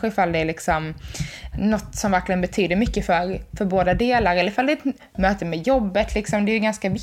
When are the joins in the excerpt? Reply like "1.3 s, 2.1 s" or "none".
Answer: 1.5 s